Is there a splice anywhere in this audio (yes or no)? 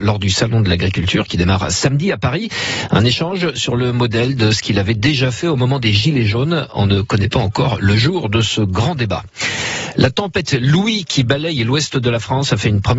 no